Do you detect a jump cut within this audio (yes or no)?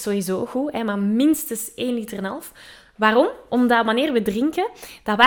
no